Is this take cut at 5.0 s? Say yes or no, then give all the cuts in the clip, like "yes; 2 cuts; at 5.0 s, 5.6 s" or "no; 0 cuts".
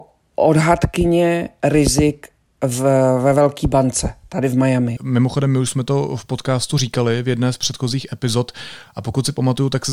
yes; 1 cut; at 5.0 s